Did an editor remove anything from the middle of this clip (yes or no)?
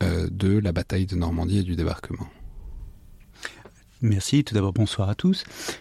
no